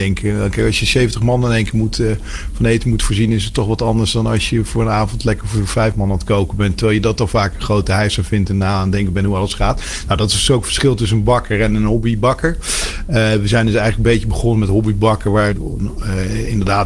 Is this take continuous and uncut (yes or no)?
no